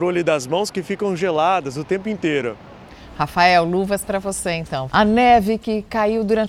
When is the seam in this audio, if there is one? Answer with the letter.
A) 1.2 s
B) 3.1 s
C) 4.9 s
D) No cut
C